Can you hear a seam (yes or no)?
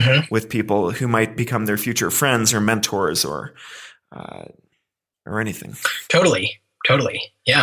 no